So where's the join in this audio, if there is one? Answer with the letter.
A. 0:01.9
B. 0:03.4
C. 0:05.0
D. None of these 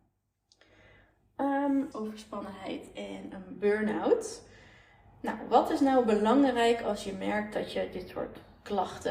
A